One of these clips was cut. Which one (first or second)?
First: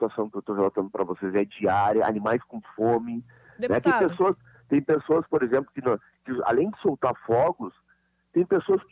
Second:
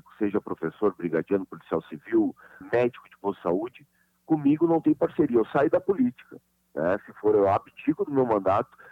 second